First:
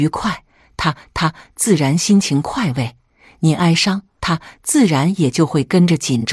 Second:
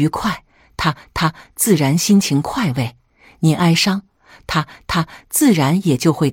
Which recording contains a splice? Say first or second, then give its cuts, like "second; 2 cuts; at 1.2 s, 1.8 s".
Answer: first; 1 cut; at 4.2 s